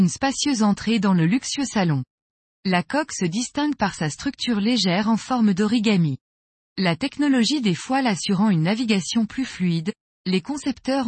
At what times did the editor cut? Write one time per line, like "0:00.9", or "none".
none